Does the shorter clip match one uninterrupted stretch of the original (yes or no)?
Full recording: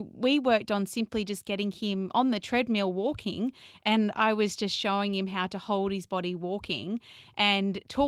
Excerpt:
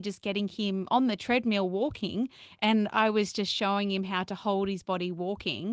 yes